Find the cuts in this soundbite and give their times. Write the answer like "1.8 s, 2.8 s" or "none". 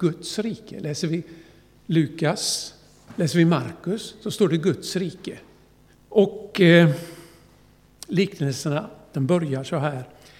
5.9 s, 9.1 s